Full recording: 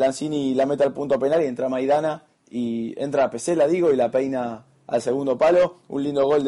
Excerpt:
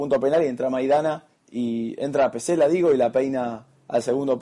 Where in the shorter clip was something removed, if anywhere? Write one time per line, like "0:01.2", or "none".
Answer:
none